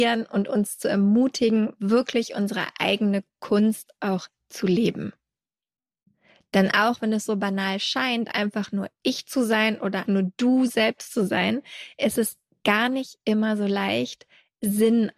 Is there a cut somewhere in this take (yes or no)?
yes